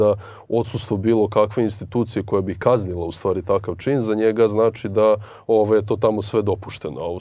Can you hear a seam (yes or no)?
no